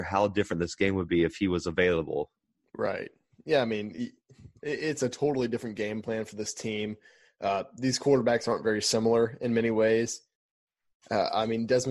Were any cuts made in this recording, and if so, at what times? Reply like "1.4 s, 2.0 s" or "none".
none